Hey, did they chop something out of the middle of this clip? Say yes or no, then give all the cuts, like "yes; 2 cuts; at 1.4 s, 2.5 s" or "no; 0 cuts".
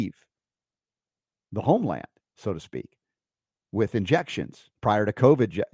no; 0 cuts